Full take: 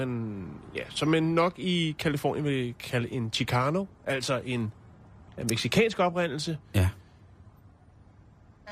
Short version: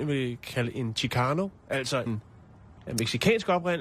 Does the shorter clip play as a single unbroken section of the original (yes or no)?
no